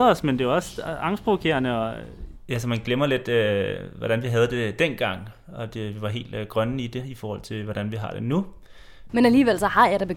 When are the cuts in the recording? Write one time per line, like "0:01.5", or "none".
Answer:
0:09.1